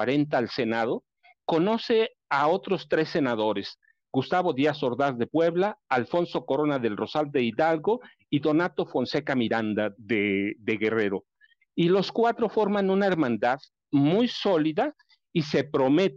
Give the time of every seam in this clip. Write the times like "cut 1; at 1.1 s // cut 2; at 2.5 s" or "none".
cut 1; at 10.0 s